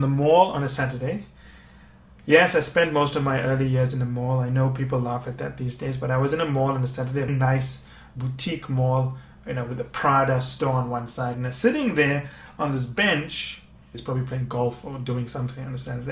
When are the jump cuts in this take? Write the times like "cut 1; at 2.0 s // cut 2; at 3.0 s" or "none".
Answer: cut 1; at 7.3 s // cut 2; at 11.3 s // cut 3; at 13.9 s